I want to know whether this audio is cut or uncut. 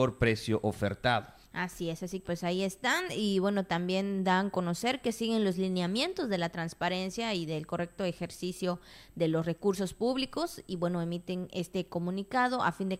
cut